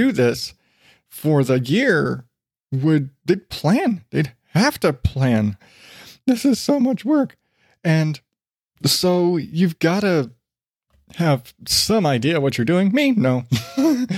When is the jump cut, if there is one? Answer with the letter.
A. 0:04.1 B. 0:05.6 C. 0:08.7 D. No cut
B